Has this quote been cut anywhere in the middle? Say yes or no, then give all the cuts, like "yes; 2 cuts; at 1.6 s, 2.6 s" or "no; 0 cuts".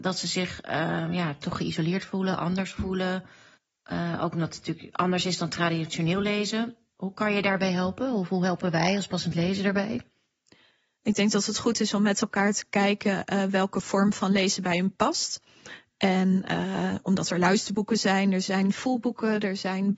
no; 0 cuts